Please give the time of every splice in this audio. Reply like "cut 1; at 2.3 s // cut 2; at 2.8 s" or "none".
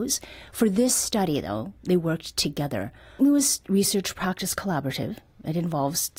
cut 1; at 3.2 s